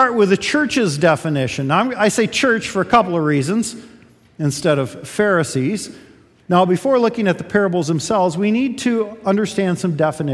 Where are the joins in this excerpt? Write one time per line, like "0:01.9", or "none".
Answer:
0:06.4